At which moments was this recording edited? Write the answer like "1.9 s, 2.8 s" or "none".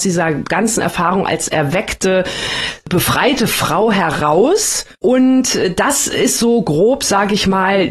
4.9 s